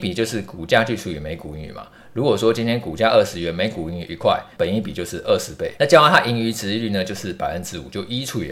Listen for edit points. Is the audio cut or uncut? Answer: cut